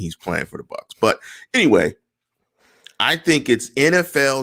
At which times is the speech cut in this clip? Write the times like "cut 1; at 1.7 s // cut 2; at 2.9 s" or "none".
none